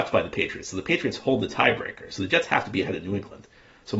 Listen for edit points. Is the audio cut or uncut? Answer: uncut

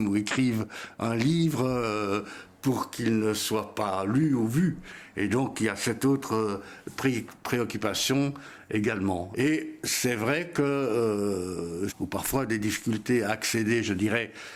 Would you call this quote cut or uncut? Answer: cut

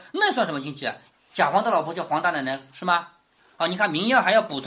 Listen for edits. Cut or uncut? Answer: cut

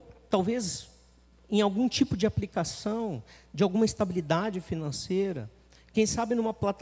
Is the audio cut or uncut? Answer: uncut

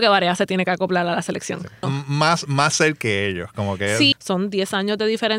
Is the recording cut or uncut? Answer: cut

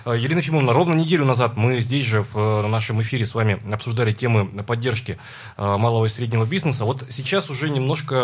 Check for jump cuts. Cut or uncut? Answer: uncut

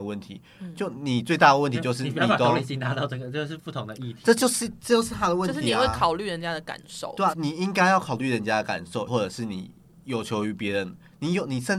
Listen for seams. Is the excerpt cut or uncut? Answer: cut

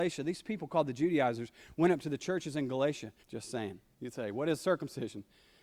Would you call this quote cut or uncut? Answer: cut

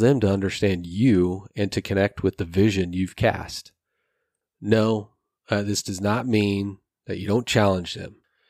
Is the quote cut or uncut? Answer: cut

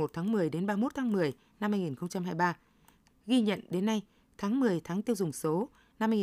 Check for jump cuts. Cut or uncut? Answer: cut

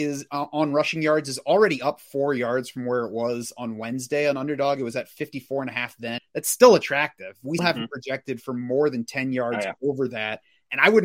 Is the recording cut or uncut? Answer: cut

